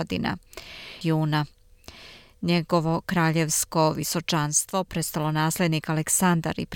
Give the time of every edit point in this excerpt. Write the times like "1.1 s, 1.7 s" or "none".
1.0 s